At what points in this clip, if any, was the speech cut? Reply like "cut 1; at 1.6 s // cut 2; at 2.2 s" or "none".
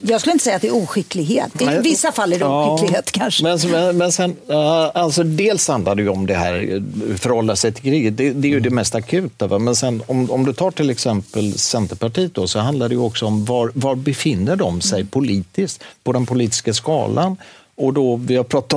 cut 1; at 1.5 s